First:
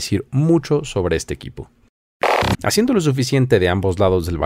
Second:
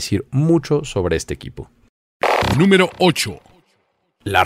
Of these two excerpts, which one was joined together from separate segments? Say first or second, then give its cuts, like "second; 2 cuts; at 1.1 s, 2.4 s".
first; 1 cut; at 2.5 s